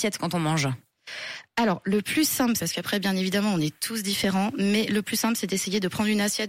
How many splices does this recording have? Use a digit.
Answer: 1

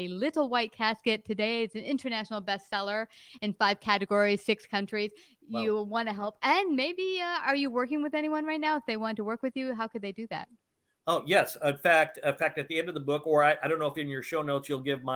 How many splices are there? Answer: 0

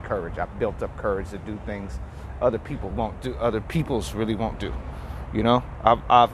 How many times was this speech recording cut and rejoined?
1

